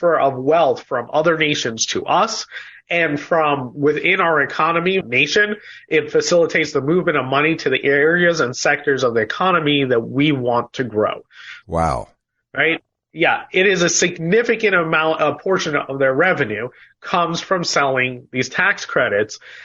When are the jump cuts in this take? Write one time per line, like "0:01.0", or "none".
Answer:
0:05.0
0:11.6